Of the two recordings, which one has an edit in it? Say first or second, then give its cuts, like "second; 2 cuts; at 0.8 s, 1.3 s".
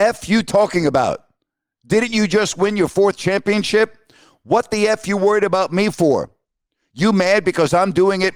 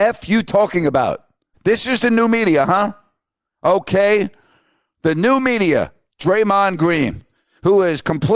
second; 1 cut; at 1.5 s